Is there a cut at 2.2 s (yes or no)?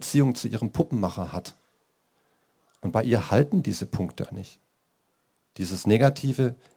no